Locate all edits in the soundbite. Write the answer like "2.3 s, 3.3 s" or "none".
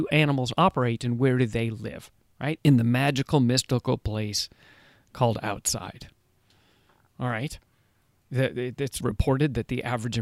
2.6 s, 9.0 s